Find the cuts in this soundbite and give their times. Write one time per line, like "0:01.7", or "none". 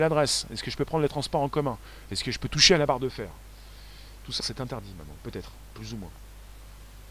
0:04.4